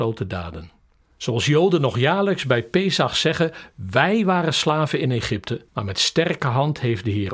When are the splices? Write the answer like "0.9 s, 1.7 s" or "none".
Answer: 1.0 s, 5.7 s